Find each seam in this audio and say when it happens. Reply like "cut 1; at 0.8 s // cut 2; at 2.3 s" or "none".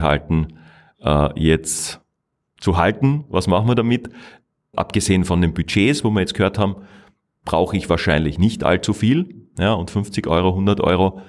cut 1; at 4.7 s

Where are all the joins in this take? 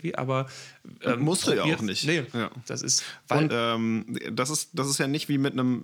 cut 1; at 2.3 s // cut 2; at 3.5 s

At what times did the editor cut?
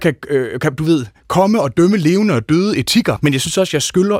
cut 1; at 3.2 s

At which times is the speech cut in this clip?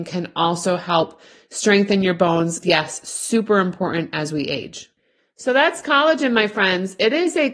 cut 1; at 2.6 s

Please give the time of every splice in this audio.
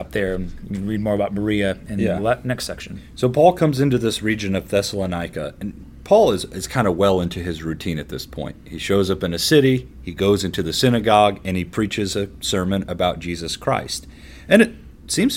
none

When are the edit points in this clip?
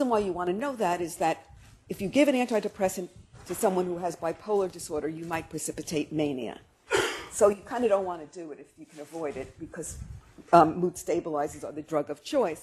none

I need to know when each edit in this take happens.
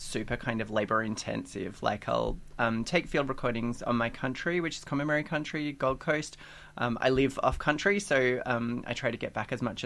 none

